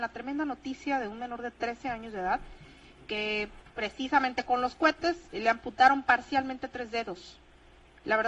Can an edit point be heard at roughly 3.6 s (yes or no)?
yes